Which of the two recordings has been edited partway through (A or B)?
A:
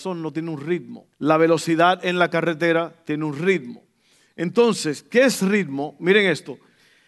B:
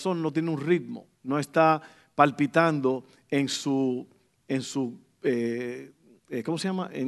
A